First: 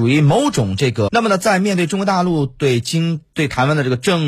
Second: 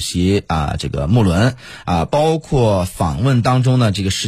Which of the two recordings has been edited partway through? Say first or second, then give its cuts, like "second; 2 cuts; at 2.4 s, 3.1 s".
first; 1 cut; at 1.1 s